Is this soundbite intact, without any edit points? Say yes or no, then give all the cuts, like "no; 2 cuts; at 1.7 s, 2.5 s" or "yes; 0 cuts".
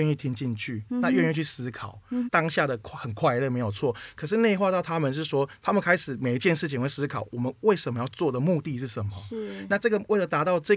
no; 1 cut; at 2.3 s